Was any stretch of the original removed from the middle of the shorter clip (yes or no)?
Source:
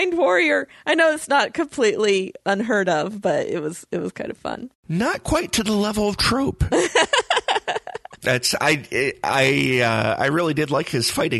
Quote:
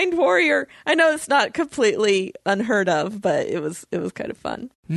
no